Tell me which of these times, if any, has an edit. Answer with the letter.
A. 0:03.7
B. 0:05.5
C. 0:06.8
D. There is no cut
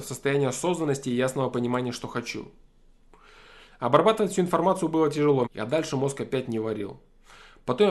B